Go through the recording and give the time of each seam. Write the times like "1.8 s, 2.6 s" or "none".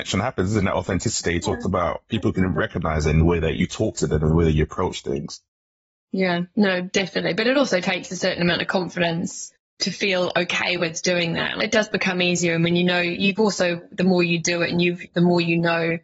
15.1 s